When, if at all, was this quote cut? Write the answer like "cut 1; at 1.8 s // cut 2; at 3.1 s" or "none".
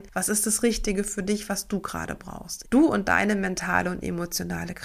cut 1; at 2.6 s